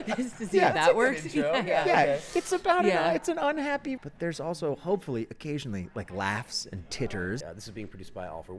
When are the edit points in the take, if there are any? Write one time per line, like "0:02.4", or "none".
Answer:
0:04.0
0:07.4